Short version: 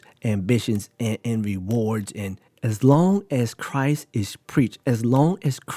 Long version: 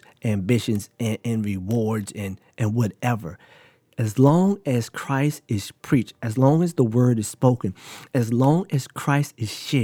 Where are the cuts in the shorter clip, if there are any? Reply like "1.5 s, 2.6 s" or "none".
2.5 s, 4.8 s